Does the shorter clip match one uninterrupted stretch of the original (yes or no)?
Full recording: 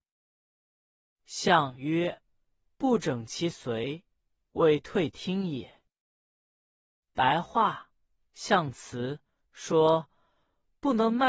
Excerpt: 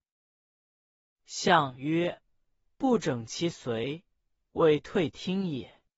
yes